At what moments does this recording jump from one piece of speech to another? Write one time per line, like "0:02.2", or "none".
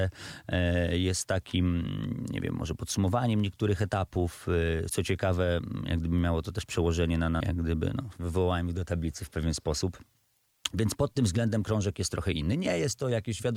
0:04.9
0:07.4

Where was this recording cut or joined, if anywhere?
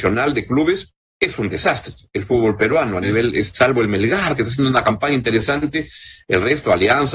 none

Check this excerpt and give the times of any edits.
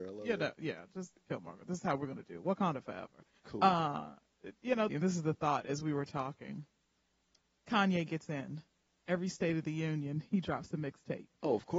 0:04.9

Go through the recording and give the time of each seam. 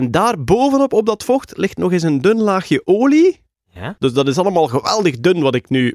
0:04.0

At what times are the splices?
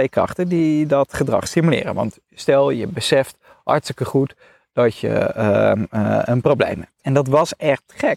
0:07.0

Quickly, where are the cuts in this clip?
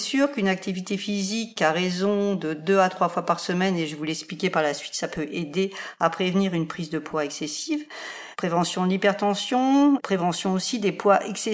0:08.3
0:10.0

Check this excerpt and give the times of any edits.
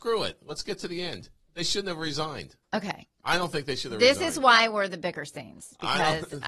0:02.6

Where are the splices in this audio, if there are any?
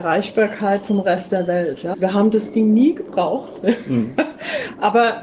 0:01.9

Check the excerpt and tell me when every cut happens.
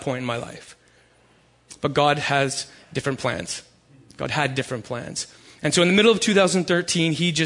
none

